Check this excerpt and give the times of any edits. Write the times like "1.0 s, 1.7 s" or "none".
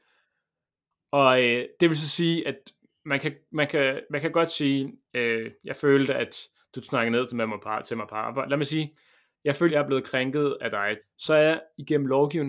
0.9 s, 9.7 s, 11.0 s